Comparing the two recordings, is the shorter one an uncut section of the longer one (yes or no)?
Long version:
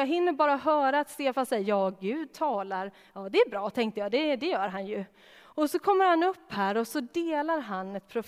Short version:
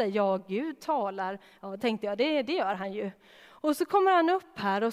no